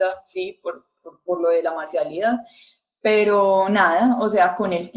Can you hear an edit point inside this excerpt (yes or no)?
no